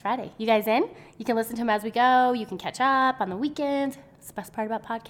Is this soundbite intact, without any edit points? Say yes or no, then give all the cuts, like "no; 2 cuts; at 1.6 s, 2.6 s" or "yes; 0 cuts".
yes; 0 cuts